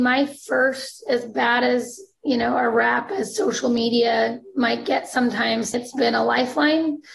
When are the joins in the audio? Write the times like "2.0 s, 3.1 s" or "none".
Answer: 5.7 s